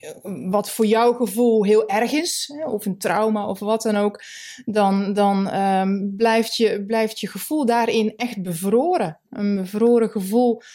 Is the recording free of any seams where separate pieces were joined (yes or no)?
yes